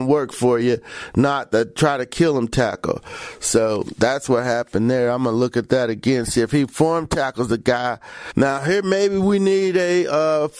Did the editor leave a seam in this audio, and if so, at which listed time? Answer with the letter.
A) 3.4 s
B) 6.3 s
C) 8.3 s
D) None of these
C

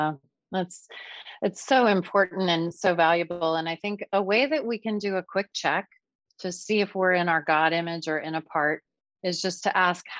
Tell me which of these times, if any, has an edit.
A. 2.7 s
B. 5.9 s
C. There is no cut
C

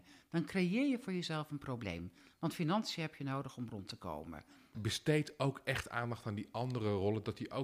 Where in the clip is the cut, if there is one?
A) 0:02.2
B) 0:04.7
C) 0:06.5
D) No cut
B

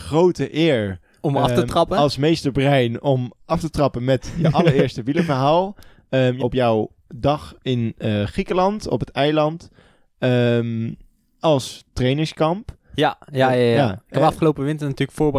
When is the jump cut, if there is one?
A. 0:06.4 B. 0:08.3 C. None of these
A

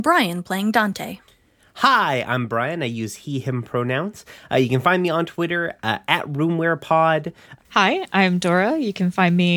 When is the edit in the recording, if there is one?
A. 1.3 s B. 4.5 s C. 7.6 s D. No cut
C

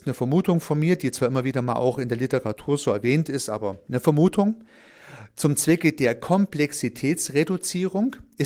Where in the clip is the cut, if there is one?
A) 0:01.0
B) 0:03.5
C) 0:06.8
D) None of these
D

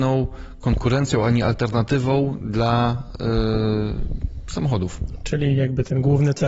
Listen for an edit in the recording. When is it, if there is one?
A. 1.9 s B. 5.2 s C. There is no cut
C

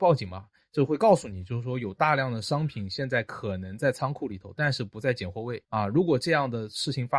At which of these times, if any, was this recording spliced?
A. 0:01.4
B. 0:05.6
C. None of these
B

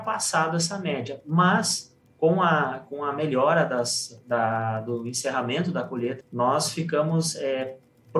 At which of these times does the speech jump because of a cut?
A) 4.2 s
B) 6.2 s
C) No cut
B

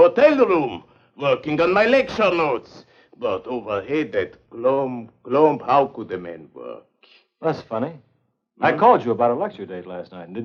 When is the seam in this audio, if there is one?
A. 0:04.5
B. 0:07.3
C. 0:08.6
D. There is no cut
A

